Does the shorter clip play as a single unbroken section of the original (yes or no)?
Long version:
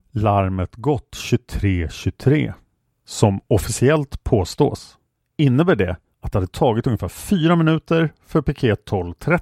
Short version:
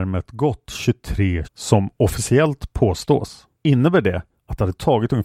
no